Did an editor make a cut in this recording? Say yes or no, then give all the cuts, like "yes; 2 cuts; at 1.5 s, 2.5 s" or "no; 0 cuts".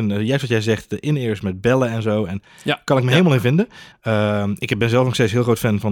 yes; 1 cut; at 3.9 s